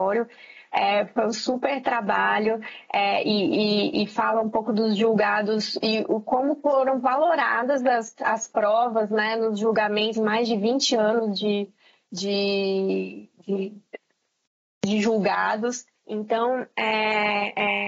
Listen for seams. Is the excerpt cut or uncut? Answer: cut